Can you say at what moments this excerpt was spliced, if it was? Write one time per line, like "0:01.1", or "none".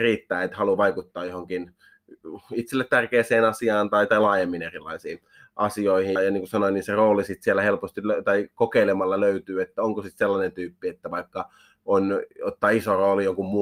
0:06.2